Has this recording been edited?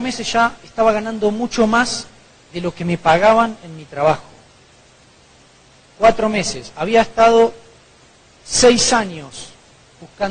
no; 0 cuts

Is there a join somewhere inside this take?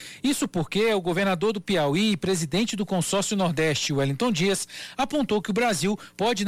no; 0 cuts

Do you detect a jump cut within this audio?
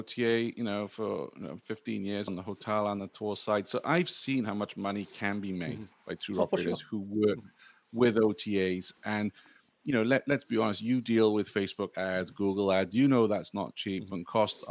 yes; 1 cut; at 2.3 s

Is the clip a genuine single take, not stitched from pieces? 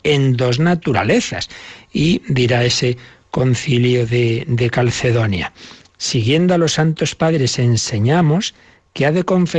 yes; 0 cuts

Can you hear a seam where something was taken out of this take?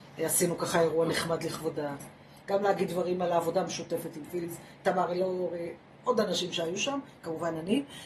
yes; 2 cuts; at 2.4 s, 4.8 s

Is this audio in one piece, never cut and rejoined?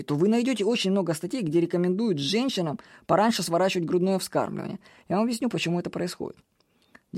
yes; 0 cuts

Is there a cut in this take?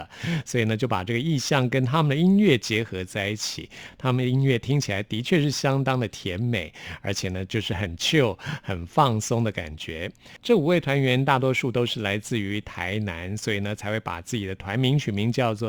no; 0 cuts

